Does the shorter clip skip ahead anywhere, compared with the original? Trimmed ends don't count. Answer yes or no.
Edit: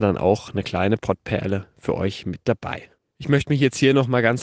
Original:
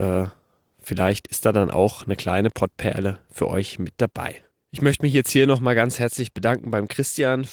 no